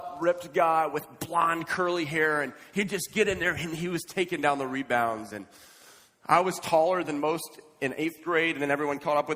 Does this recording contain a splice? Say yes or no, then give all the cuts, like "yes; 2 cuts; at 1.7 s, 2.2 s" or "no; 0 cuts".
no; 0 cuts